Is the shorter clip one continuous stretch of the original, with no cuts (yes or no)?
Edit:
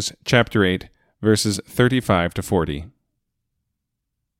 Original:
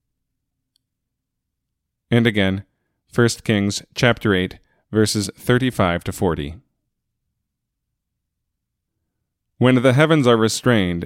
yes